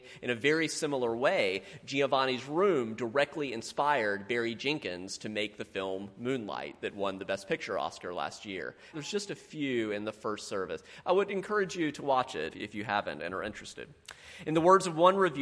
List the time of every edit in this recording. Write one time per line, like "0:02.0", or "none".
0:08.9
0:12.5